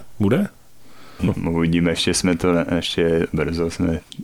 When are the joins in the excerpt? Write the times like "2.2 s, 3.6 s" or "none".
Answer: 1.2 s